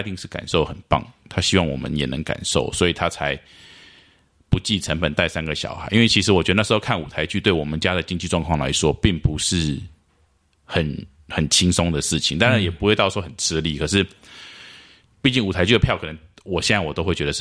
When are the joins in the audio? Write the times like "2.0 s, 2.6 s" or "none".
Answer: none